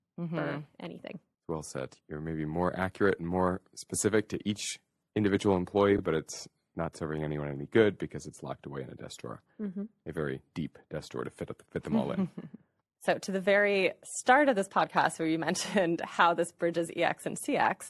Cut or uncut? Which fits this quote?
uncut